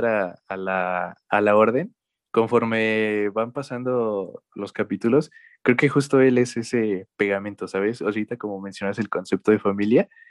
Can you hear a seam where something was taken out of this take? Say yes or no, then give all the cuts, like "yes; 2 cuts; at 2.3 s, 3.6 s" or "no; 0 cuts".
no; 0 cuts